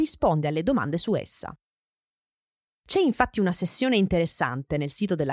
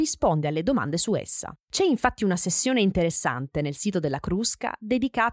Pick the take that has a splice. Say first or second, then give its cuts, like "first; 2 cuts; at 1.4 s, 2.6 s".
second; 1 cut; at 1.6 s